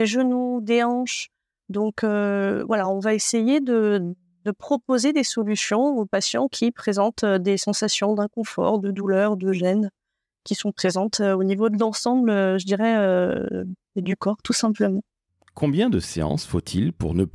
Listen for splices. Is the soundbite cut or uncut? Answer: uncut